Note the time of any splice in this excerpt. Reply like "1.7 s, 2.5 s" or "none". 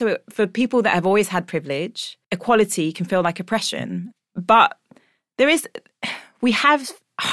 2.2 s